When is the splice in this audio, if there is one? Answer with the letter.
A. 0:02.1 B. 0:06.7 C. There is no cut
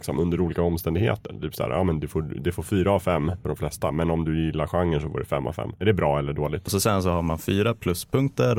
B